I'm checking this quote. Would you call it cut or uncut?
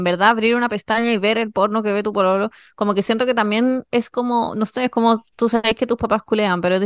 uncut